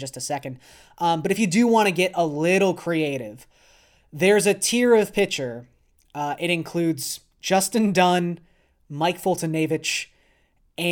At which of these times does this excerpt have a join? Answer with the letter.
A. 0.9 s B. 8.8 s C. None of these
C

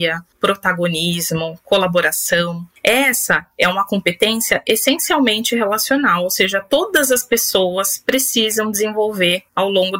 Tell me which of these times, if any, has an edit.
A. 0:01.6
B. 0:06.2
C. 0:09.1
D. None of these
D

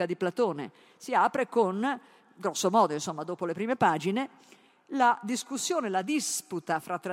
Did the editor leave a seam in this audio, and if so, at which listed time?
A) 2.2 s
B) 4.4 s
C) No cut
C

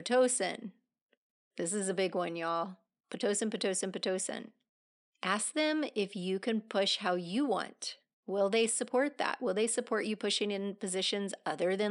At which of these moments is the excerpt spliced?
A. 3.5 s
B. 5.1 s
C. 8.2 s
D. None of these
B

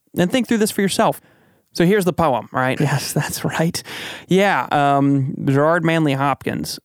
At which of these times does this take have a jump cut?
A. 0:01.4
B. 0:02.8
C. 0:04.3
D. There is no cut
B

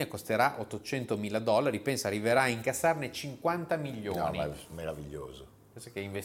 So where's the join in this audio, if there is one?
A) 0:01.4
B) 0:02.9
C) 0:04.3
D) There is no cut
D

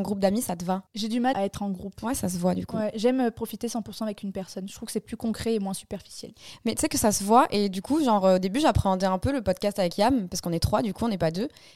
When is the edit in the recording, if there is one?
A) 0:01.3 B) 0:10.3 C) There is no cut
A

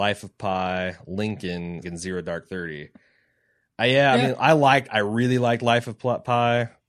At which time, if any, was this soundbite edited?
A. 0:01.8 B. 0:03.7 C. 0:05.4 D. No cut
A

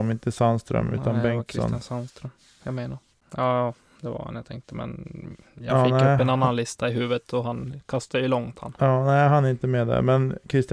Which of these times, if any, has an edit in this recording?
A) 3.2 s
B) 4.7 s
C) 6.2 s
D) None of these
A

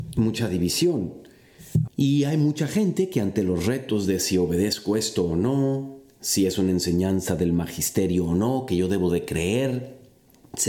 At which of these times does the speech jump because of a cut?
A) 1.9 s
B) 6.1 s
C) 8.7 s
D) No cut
A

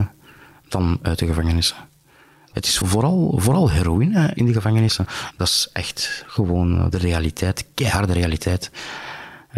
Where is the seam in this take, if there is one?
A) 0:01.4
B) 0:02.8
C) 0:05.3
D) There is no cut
B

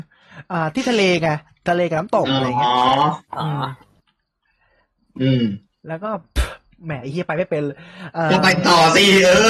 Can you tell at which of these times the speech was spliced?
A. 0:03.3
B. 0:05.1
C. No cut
A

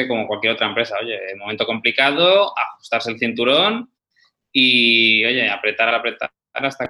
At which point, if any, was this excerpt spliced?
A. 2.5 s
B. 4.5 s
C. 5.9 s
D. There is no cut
C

